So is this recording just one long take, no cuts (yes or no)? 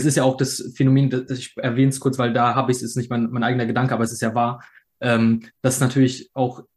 yes